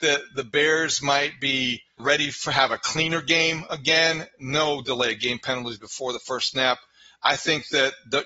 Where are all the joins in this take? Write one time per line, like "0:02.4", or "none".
0:02.0